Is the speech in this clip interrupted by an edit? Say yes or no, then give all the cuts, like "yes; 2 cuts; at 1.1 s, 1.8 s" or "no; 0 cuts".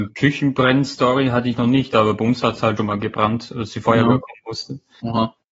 yes; 1 cut; at 2.8 s